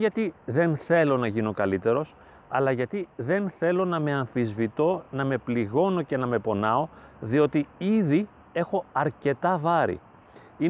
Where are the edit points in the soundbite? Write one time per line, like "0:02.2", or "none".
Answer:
none